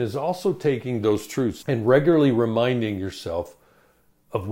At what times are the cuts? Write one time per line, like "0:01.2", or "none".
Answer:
0:01.6